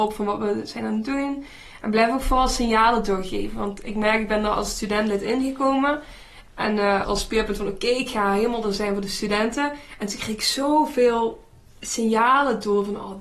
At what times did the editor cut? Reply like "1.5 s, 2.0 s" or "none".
7.1 s